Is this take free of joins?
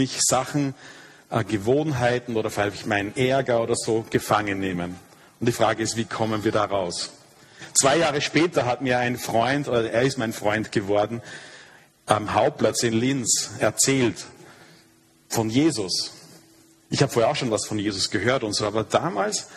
yes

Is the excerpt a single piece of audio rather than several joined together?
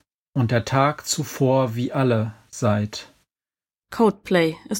no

